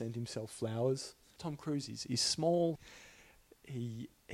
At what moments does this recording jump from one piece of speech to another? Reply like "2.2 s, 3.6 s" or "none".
1.4 s, 2.8 s